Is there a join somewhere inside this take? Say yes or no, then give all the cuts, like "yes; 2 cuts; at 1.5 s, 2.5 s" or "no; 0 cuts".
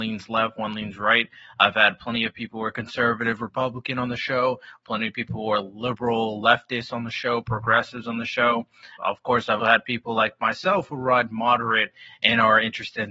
yes; 1 cut; at 9.6 s